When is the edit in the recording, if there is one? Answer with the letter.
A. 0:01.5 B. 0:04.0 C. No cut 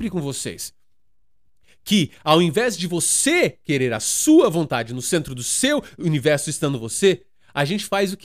C